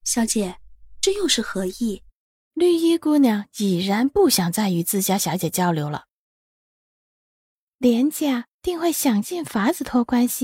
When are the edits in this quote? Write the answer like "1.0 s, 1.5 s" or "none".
2.4 s, 7.7 s